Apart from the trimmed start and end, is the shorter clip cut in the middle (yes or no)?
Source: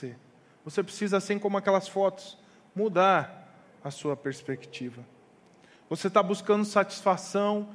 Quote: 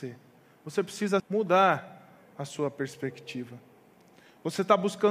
yes